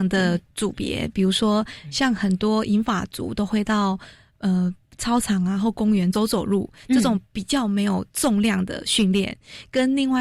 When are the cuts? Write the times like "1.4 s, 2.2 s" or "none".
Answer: none

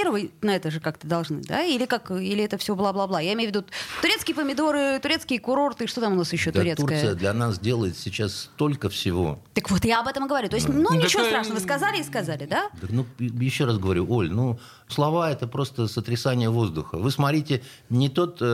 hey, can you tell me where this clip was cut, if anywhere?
14.9 s

